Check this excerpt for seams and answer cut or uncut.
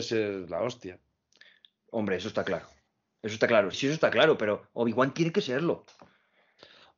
cut